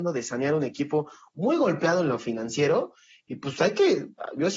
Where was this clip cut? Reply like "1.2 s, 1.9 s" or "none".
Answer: none